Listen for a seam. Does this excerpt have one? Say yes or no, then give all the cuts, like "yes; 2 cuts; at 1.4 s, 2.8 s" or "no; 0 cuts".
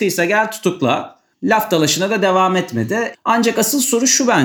yes; 2 cuts; at 1.3 s, 3.1 s